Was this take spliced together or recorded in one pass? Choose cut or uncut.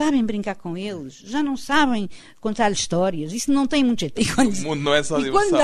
cut